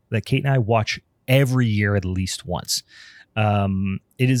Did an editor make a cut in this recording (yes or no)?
no